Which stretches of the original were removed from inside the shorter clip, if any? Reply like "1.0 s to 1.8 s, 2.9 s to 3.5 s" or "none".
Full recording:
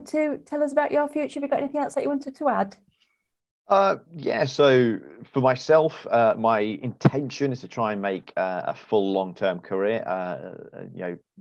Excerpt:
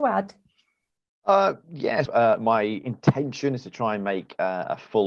4.5 s to 6.0 s